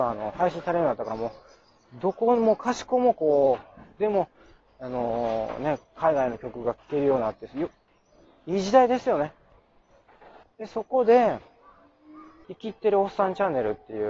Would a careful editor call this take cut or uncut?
cut